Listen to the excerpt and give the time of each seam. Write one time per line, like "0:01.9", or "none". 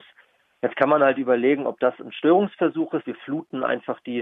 0:03.0